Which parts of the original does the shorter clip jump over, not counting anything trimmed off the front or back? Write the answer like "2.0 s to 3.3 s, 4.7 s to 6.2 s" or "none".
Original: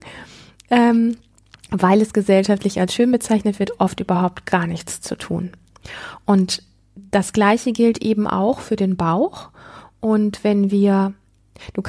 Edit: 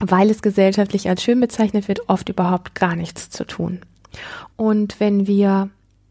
6.2 s to 10.0 s